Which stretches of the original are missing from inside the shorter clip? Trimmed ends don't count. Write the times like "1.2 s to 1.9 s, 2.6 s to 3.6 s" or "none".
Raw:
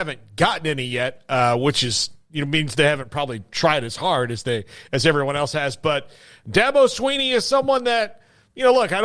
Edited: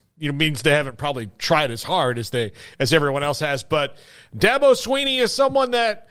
none